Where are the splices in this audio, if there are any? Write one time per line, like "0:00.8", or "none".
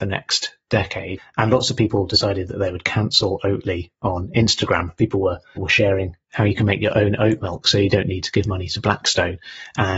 0:01.2
0:05.6